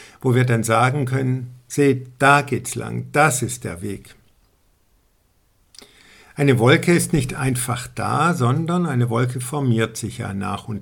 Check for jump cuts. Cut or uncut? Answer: uncut